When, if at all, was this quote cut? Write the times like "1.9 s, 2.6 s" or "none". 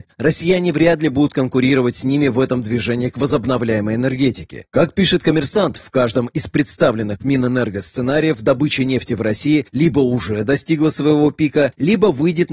4.7 s